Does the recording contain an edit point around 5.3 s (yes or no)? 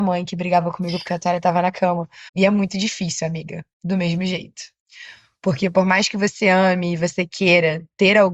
no